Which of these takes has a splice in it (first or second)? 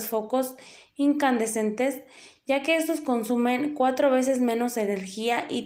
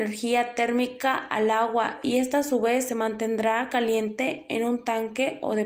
second